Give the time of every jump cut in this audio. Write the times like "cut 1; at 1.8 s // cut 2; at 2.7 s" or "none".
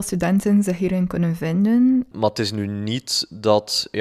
cut 1; at 2.1 s